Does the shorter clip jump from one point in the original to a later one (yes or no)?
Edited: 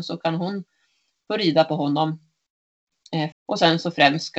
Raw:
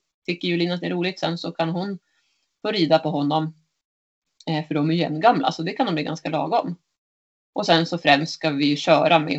yes